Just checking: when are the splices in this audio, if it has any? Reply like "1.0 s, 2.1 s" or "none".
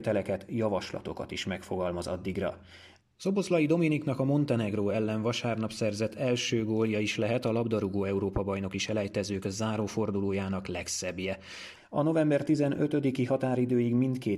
3.0 s, 11.8 s